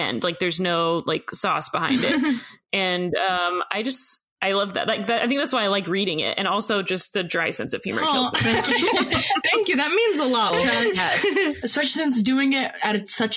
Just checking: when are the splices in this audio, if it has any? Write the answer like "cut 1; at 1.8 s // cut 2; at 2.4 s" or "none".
cut 1; at 10.5 s